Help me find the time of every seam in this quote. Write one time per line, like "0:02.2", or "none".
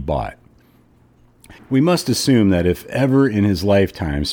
0:01.6